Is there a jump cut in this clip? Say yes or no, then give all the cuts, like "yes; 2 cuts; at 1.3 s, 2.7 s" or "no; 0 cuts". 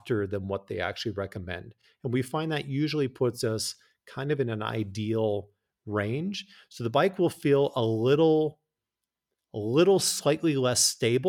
no; 0 cuts